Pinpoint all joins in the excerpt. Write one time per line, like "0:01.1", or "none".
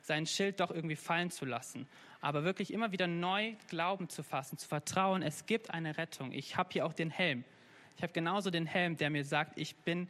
none

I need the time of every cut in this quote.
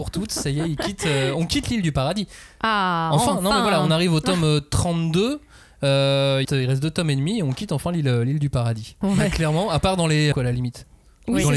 0:06.4
0:09.0
0:10.3

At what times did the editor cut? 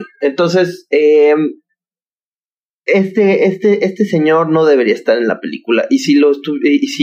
none

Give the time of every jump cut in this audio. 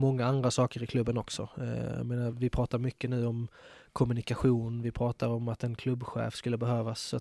none

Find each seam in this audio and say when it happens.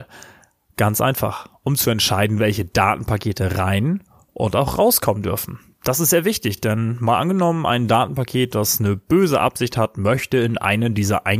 none

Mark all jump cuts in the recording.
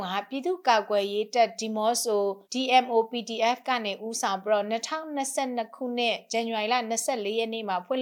0:02.5

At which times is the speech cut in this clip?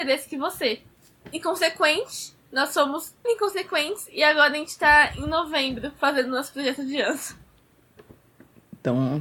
0:01.2
0:03.2

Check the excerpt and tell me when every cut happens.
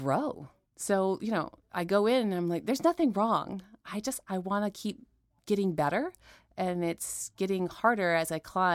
none

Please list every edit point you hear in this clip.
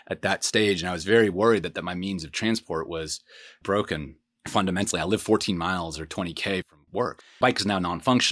0:07.2

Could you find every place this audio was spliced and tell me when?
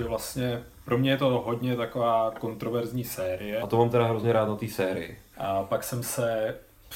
0:03.6
0:05.3

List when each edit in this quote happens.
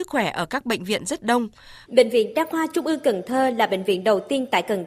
0:01.8

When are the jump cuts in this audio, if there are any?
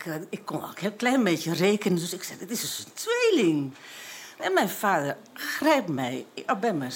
0:04.4

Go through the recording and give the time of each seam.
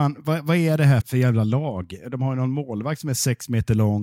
0:01.0

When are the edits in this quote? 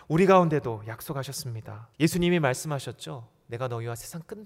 0:01.9

